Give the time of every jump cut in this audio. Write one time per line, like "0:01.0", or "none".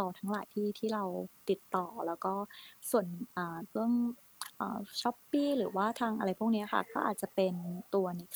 none